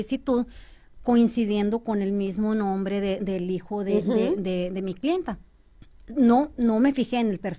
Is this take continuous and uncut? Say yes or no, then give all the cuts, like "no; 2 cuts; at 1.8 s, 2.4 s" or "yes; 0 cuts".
yes; 0 cuts